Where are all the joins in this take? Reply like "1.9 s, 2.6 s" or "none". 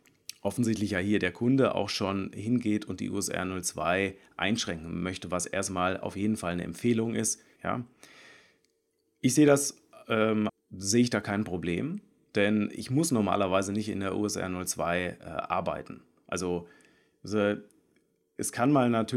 7.6 s, 10.5 s